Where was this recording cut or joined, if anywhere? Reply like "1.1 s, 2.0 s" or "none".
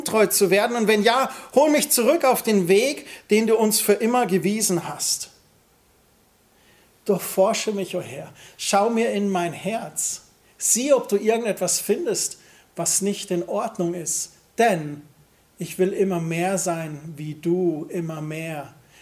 none